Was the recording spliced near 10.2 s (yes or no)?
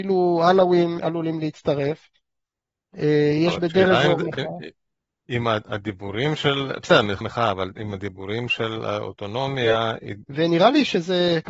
yes